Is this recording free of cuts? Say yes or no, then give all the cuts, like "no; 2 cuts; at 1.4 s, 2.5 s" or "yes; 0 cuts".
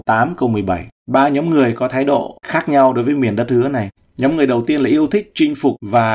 no; 1 cut; at 1.0 s